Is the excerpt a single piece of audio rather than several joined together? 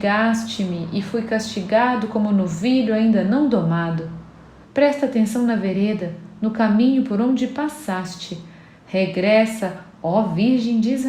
no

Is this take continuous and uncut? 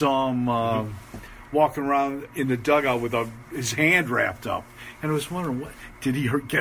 yes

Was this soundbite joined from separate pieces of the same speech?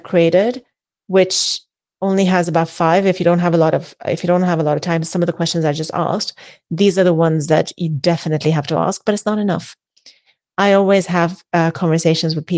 no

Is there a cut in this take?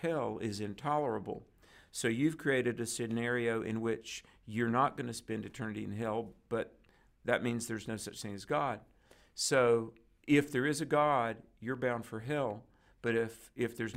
no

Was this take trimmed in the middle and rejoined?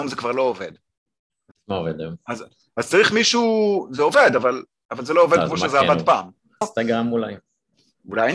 yes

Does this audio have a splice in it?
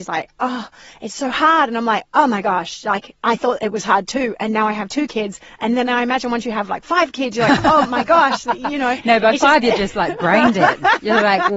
no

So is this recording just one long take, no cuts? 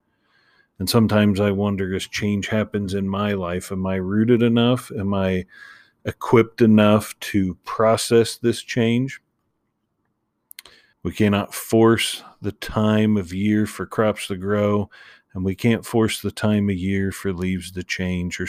no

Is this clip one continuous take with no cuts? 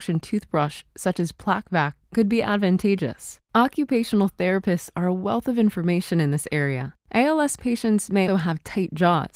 no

